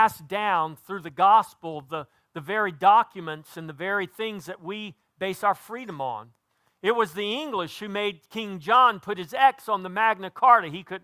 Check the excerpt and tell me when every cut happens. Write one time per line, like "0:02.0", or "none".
none